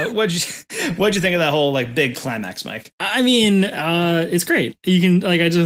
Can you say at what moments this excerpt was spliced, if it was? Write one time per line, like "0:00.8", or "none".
none